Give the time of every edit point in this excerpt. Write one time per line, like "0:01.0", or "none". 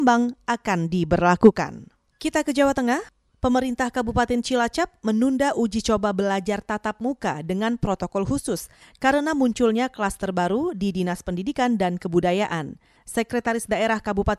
0:13.0